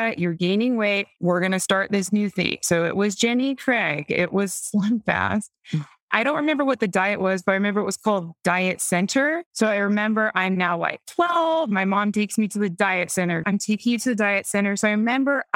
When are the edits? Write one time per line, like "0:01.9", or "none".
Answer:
0:13.4